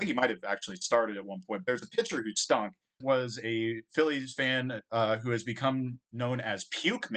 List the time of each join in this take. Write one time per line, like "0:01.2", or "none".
0:03.0